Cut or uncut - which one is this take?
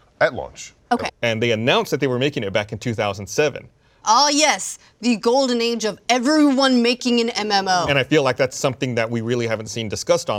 cut